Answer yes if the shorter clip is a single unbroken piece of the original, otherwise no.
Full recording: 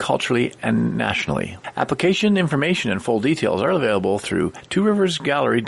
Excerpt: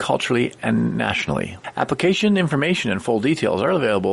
yes